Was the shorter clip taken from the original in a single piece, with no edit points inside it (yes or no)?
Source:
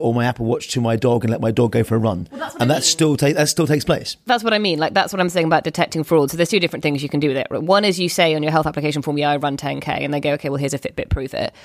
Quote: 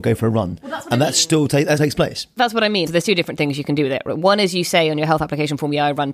no